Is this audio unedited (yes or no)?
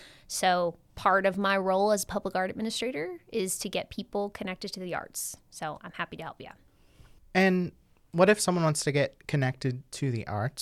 yes